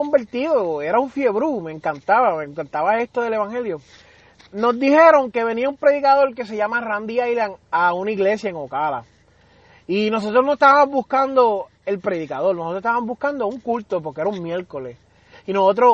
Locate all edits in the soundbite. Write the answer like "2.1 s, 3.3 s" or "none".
none